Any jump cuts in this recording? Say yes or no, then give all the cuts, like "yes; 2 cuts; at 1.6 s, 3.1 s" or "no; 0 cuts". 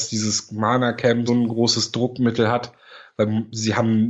yes; 1 cut; at 1.3 s